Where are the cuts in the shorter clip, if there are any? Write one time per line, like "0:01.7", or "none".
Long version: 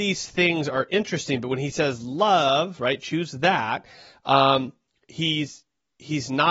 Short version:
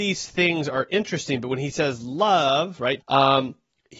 0:03.0